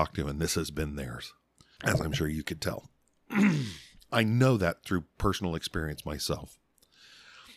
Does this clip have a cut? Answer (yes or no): yes